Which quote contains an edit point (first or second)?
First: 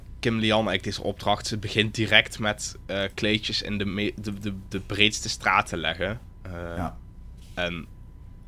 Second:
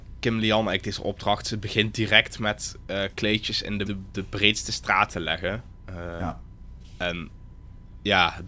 second